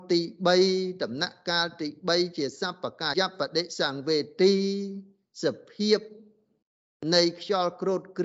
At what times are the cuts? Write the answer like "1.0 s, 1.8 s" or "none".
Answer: 3.1 s